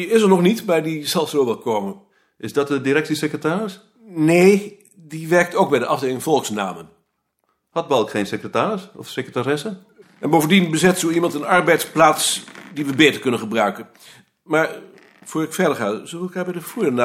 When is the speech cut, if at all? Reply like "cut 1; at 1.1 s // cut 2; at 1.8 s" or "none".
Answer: cut 1; at 10.0 s